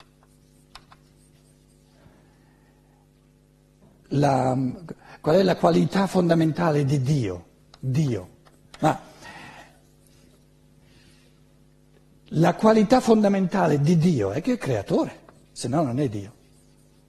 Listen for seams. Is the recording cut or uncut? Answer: cut